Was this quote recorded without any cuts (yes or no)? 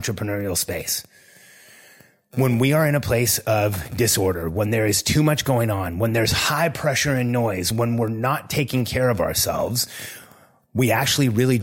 yes